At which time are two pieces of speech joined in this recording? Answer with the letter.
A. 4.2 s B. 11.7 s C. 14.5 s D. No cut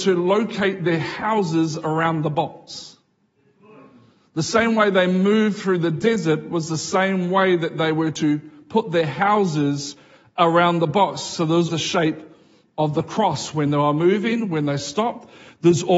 B